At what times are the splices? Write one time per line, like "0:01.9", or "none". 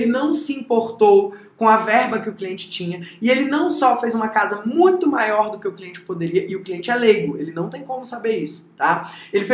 none